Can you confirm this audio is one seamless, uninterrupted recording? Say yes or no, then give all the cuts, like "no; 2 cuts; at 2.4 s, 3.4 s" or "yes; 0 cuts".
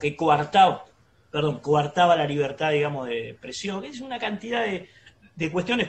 yes; 0 cuts